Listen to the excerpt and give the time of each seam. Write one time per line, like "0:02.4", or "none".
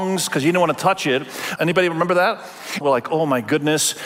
0:01.6
0:02.8